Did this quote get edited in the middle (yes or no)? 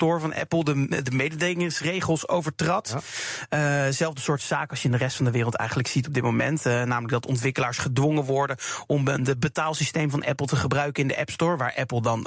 no